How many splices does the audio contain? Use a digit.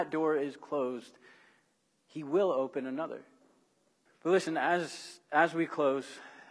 1